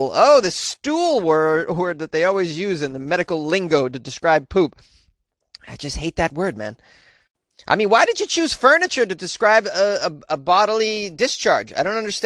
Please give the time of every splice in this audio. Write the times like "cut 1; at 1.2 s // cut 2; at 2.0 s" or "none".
none